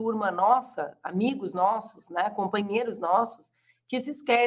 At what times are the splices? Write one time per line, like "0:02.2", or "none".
none